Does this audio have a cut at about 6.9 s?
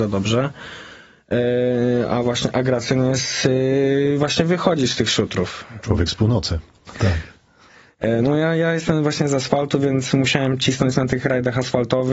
yes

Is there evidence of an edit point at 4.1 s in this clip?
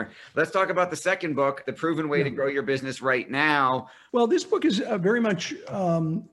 yes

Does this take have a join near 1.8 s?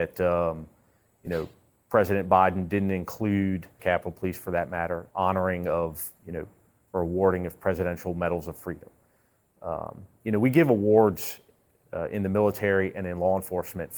no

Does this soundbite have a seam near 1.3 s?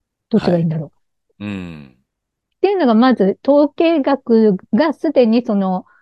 yes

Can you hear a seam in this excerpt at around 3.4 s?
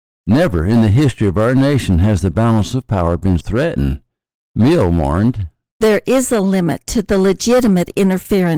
yes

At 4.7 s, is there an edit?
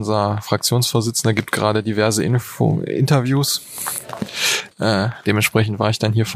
yes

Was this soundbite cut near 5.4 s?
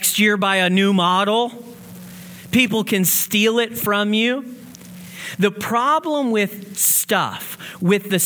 no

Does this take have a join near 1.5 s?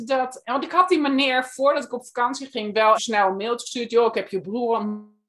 no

